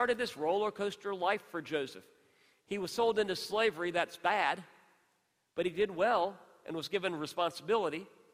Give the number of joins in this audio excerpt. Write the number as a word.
zero